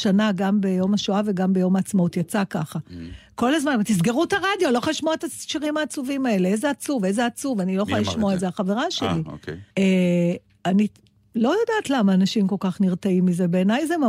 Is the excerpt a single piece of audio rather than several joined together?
no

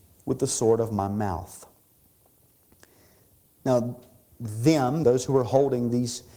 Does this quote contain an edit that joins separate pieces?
yes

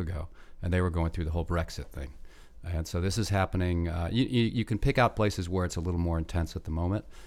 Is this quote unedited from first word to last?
yes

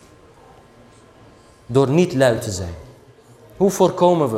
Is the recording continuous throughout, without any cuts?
yes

